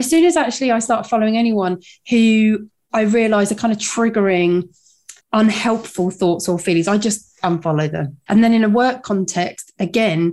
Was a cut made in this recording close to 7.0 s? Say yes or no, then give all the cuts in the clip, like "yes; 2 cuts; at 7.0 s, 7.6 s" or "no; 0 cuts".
no; 2 cuts; at 5.2 s, 8.3 s